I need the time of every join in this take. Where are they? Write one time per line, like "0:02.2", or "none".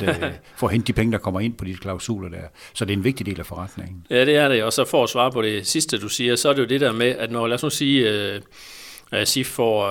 none